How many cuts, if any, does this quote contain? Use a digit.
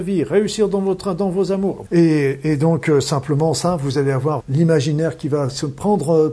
2